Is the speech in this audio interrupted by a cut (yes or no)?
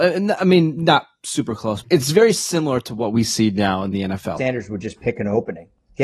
yes